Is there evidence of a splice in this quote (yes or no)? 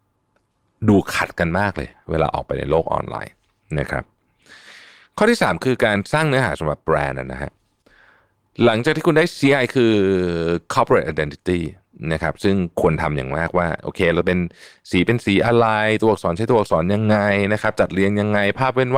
yes